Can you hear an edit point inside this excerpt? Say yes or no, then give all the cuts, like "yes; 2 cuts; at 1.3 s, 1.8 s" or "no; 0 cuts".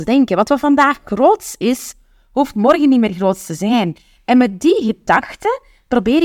no; 0 cuts